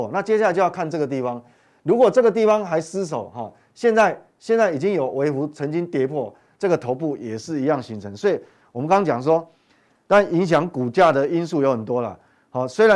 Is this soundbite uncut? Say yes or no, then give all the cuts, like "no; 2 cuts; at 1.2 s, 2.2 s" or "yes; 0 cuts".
no; 1 cut; at 6.5 s